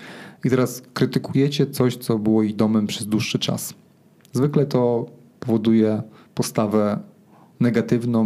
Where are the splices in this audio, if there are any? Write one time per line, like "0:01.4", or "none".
none